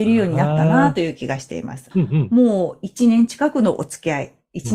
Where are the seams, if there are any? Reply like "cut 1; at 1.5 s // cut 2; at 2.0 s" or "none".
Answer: cut 1; at 1.9 s